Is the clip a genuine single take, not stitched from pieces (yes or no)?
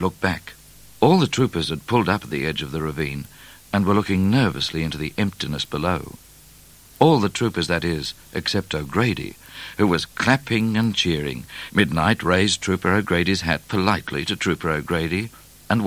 no